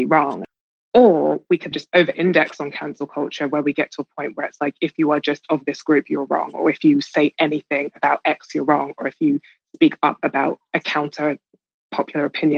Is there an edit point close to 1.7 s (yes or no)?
yes